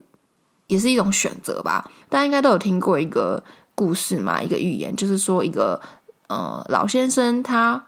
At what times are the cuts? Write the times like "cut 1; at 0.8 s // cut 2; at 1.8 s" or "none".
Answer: cut 1; at 2.0 s